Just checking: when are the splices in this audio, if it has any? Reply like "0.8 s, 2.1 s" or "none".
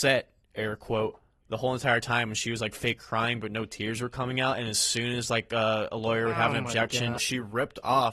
7.2 s